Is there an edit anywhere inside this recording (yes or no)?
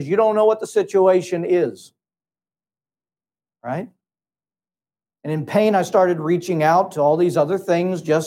no